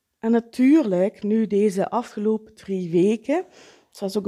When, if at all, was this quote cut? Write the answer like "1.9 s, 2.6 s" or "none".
none